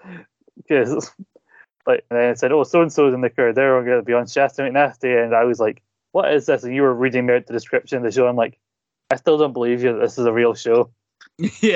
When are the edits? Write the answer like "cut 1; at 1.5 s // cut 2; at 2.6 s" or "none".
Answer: cut 1; at 2.1 s